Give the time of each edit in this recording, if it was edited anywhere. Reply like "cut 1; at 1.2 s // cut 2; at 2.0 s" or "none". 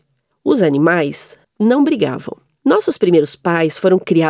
cut 1; at 2.6 s